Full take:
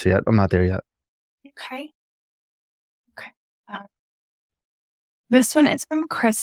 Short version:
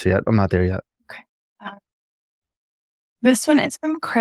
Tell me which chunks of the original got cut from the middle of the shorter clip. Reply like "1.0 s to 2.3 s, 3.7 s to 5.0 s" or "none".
0.9 s to 3.0 s